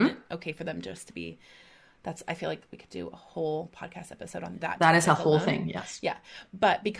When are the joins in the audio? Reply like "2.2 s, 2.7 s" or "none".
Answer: none